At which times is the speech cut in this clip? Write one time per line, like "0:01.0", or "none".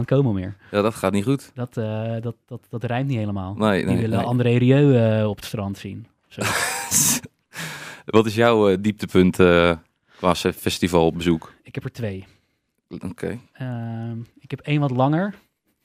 none